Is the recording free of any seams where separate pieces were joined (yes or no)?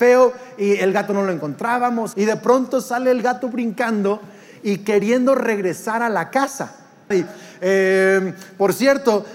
no